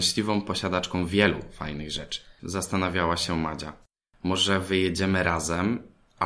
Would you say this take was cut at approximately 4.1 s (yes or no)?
no